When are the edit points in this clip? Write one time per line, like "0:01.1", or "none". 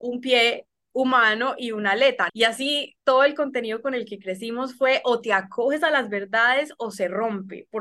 0:02.3